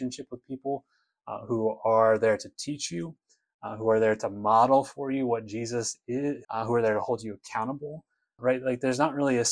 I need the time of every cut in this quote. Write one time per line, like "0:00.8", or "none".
0:06.4
0:08.4